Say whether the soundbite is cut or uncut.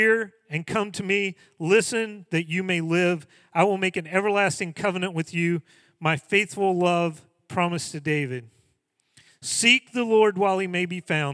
uncut